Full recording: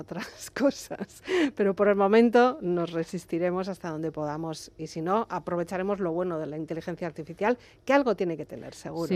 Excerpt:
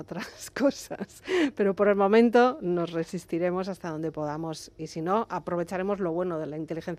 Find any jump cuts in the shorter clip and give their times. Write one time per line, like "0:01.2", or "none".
none